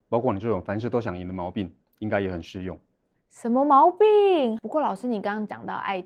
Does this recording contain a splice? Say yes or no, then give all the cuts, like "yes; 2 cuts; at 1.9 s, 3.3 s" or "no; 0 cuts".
yes; 1 cut; at 4.6 s